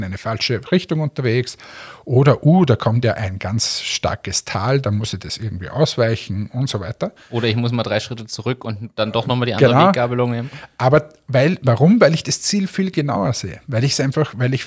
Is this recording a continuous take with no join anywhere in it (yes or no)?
yes